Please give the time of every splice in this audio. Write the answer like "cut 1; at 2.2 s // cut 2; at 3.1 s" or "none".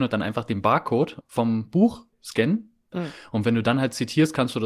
cut 1; at 1.2 s // cut 2; at 2.9 s